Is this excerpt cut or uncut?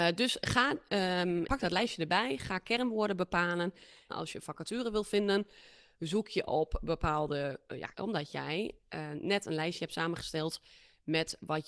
cut